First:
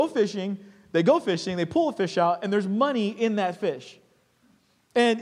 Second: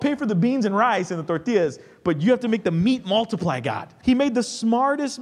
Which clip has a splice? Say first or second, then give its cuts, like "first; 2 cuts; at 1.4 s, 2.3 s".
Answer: second; 1 cut; at 4.0 s